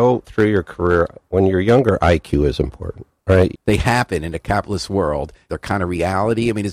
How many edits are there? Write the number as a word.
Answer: two